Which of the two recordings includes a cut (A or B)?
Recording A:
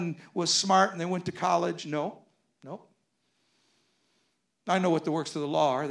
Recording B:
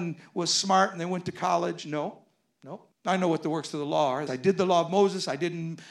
B